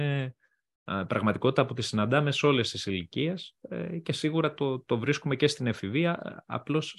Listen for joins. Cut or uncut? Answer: uncut